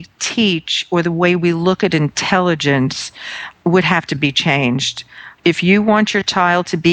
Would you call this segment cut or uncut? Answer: cut